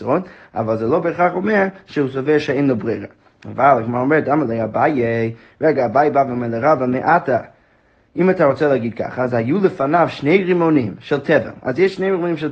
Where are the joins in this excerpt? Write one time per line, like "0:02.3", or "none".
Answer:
none